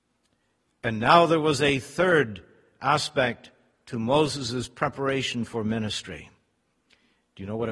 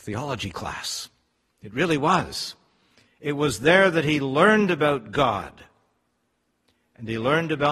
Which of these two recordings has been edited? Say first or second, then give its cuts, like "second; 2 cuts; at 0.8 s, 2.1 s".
second; 1 cut; at 3.1 s